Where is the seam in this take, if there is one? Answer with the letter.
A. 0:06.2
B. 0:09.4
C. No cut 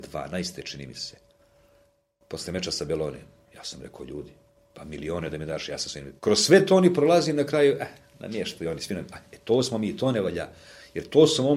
A